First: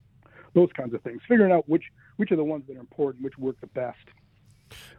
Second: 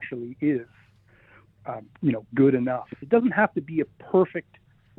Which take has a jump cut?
second; 1 cut; at 3.0 s

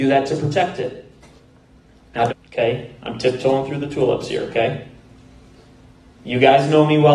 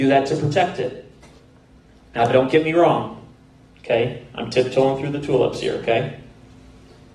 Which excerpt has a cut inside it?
first; 1 cut; at 2.3 s

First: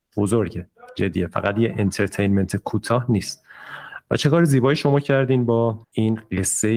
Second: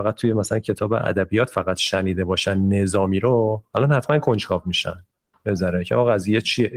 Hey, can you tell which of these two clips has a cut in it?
first; 1 cut; at 5.8 s

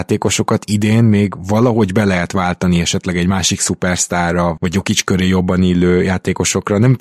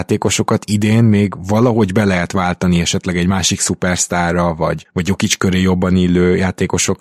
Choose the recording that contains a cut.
first; 1 cut; at 4.6 s

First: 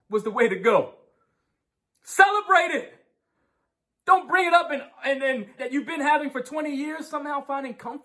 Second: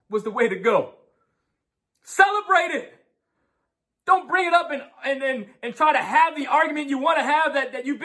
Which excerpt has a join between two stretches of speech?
first; 1 cut; at 5.6 s

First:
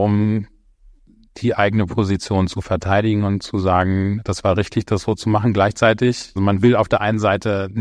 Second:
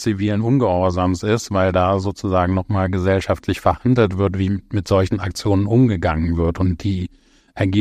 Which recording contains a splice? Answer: first; 1 cut; at 6.4 s

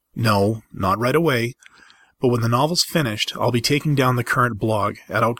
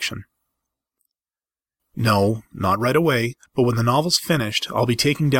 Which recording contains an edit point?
second; 2 cuts; at 1.8 s, 3.5 s

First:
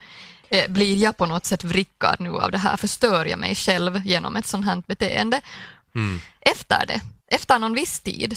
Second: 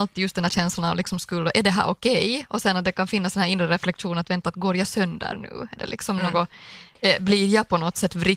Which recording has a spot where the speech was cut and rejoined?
first; 2 cuts; at 5.9 s, 7.2 s

